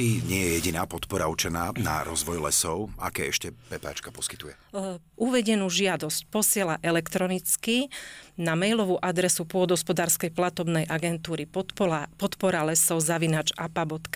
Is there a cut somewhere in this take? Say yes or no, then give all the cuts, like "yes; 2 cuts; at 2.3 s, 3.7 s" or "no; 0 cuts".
yes; 1 cut; at 5.1 s